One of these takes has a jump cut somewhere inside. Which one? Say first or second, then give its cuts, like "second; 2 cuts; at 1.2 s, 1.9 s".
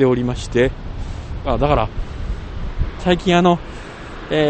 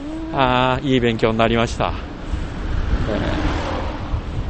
first; 2 cuts; at 1.4 s, 3.0 s